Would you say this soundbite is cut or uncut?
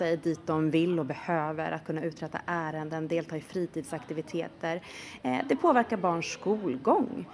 uncut